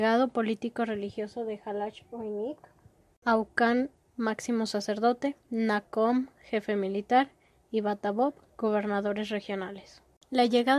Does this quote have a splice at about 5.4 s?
yes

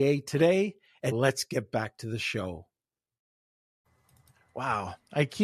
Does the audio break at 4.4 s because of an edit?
no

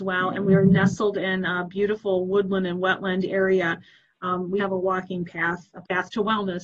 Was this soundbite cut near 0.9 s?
no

